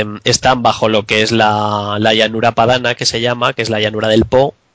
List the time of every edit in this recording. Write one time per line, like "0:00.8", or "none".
none